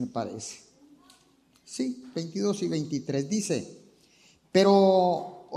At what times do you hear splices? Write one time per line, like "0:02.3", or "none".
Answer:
none